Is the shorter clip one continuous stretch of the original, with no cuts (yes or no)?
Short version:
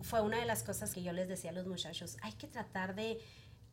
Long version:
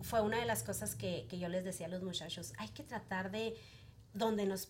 no